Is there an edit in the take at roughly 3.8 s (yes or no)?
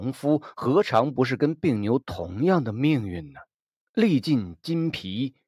yes